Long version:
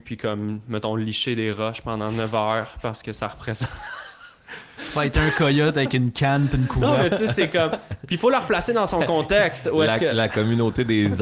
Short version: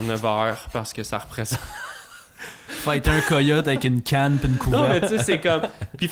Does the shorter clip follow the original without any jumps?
yes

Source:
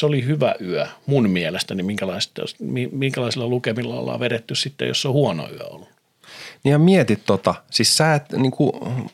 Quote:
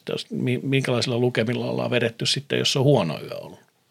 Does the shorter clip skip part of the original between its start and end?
no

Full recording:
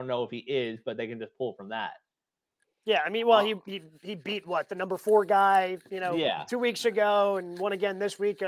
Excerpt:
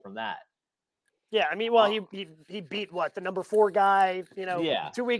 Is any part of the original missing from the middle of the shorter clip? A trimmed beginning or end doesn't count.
no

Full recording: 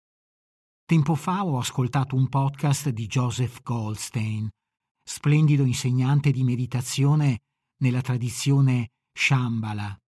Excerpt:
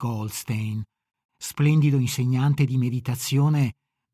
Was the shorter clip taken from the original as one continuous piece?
yes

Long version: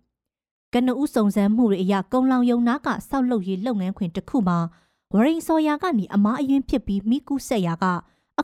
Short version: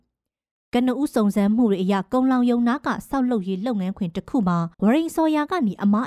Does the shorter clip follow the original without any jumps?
no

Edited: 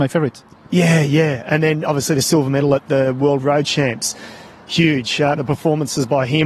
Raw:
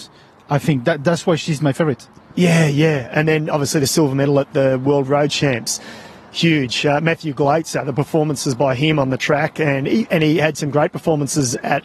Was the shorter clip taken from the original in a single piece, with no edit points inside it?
no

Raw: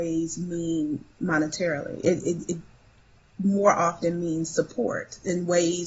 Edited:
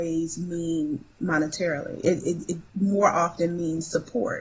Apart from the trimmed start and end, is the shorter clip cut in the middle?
yes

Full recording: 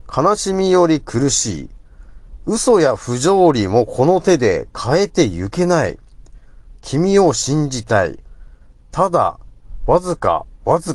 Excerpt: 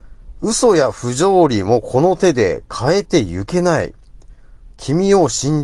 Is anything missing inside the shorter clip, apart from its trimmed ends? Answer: no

